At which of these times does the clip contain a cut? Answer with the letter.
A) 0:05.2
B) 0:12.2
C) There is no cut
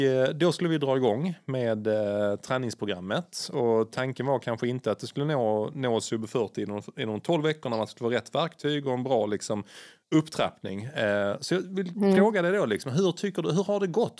C